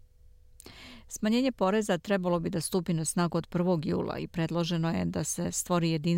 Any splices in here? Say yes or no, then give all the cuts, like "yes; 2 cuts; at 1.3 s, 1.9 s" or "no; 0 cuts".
no; 0 cuts